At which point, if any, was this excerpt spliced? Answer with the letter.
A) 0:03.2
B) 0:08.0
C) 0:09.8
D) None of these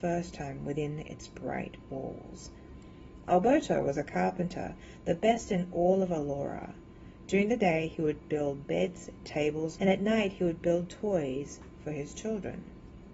C